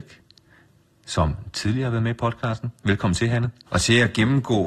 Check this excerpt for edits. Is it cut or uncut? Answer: cut